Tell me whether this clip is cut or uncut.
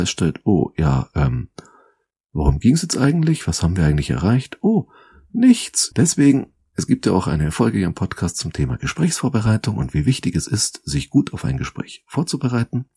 cut